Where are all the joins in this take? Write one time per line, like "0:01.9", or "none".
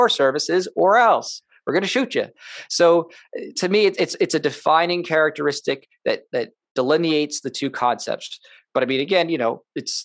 none